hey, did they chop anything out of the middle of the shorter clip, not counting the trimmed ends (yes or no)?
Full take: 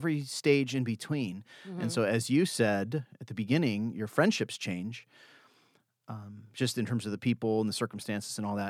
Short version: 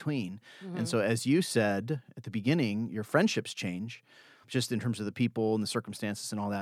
yes